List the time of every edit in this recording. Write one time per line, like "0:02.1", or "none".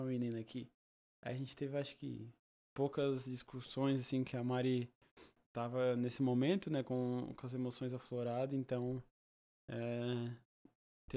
none